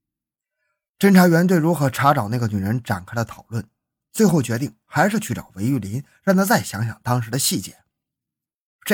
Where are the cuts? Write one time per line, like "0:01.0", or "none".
none